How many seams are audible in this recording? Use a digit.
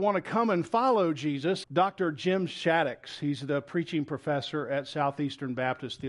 1